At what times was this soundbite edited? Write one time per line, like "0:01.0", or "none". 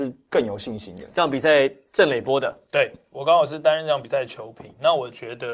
none